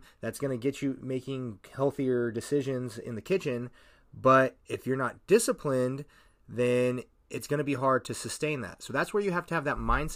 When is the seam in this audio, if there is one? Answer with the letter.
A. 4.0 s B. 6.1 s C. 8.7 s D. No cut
D